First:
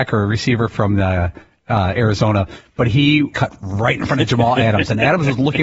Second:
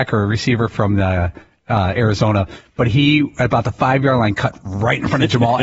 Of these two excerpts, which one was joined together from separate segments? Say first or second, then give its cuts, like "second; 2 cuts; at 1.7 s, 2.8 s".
first; 1 cut; at 3.3 s